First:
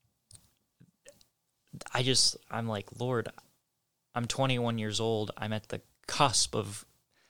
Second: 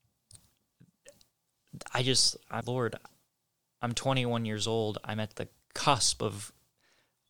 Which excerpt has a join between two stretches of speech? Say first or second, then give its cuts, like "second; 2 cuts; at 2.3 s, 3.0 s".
second; 1 cut; at 2.6 s